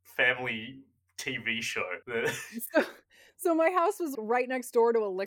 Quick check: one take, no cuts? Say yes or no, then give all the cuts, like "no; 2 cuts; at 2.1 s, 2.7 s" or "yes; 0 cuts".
no; 2 cuts; at 2.0 s, 4.1 s